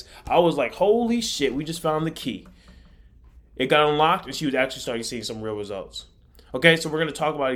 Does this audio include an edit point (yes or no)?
no